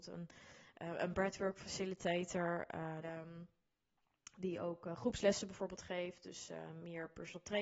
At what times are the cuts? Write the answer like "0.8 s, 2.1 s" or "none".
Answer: 3.0 s